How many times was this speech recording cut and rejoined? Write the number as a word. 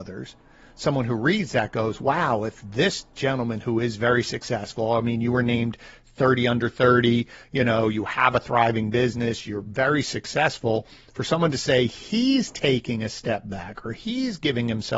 zero